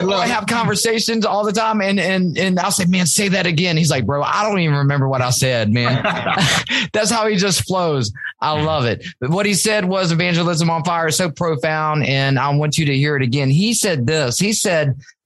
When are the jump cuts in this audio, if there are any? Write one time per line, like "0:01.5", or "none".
none